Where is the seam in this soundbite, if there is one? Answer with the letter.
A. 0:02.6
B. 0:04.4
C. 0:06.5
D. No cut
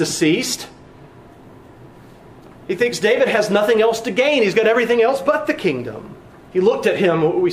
C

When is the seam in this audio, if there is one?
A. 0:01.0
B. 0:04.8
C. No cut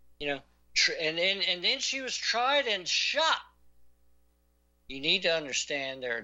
B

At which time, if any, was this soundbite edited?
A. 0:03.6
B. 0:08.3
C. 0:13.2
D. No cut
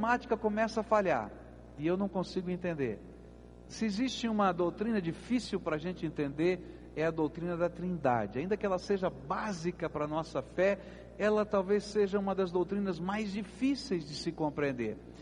A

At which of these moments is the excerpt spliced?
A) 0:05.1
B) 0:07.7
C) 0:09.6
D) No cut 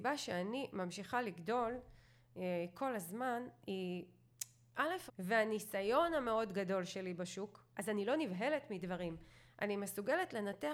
A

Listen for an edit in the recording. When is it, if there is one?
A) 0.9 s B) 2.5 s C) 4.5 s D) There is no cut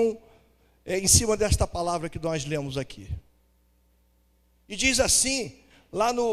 C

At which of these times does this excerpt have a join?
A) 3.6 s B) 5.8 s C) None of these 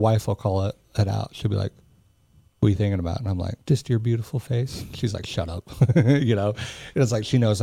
A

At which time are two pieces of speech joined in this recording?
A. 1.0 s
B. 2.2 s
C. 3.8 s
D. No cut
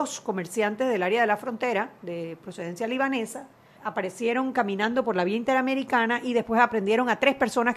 C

